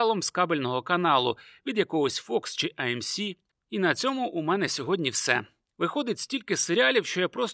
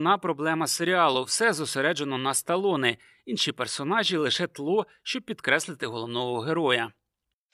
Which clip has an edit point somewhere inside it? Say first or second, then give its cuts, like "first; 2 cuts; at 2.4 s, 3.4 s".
first; 1 cut; at 3.5 s